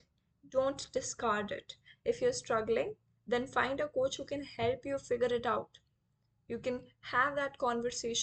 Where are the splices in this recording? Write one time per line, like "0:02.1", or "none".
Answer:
none